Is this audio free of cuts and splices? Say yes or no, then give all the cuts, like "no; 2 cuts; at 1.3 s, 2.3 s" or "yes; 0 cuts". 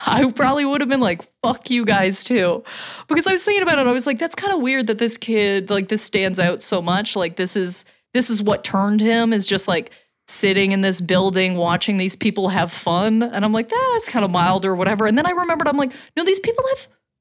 yes; 0 cuts